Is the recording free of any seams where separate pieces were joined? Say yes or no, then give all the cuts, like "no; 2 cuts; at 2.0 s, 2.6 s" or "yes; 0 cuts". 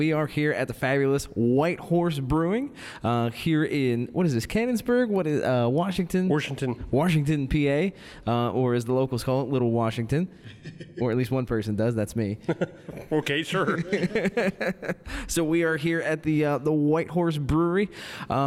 yes; 0 cuts